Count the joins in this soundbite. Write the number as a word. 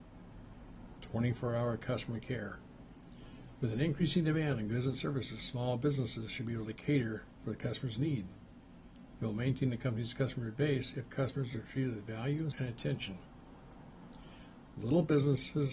one